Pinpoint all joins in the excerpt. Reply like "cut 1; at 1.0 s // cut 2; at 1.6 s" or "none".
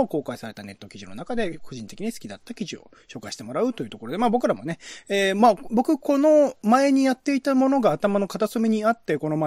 none